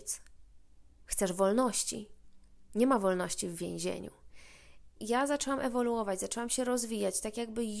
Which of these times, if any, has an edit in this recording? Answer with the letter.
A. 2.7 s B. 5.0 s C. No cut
B